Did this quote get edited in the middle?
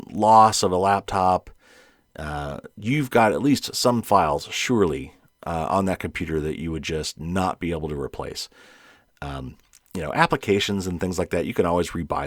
no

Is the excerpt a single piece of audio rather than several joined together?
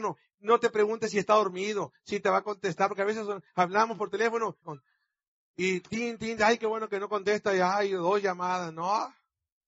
no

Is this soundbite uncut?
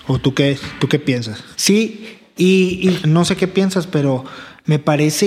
no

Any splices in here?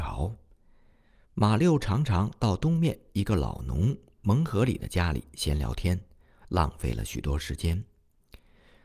no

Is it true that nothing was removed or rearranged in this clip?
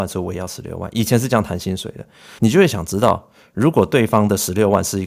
no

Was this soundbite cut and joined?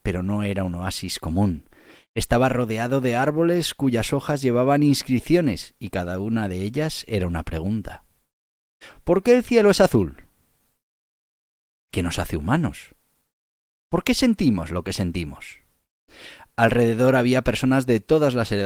no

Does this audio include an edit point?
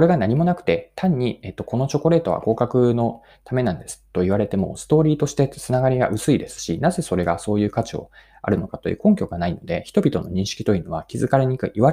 no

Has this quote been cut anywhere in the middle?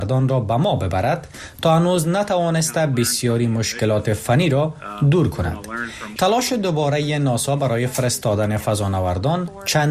yes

